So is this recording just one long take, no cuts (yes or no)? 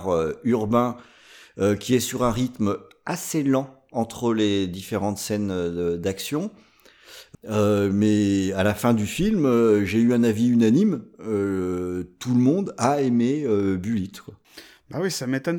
no